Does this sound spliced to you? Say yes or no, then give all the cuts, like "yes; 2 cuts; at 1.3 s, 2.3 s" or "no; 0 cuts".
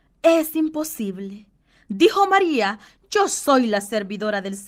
no; 0 cuts